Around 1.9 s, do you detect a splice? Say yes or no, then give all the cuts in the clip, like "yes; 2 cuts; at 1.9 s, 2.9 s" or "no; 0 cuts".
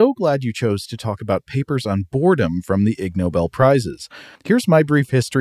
no; 1 cut; at 4.4 s